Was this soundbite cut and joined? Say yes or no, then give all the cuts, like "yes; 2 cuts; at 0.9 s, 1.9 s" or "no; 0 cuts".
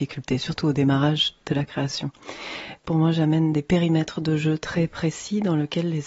yes; 1 cut; at 2.8 s